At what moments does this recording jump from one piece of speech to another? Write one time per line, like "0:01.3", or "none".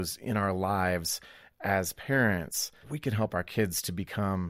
0:02.8